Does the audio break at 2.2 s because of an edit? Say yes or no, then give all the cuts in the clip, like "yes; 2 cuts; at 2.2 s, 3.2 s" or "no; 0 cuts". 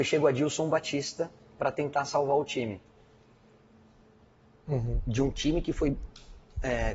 no; 1 cut; at 4.6 s